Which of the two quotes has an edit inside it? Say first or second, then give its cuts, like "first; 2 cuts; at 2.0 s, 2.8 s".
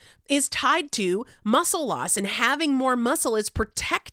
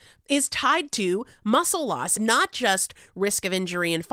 second; 1 cut; at 2.2 s